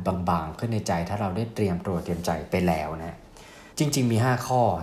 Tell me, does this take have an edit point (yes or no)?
yes